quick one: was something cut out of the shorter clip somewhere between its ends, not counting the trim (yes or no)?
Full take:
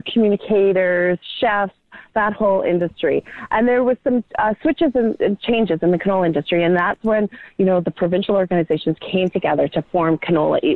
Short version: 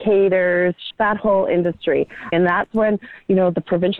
yes